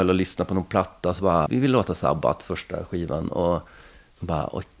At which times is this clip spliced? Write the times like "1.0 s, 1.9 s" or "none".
1.5 s, 3.3 s